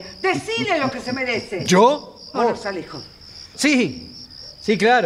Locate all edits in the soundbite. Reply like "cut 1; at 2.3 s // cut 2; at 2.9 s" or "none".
cut 1; at 2.3 s // cut 2; at 3.5 s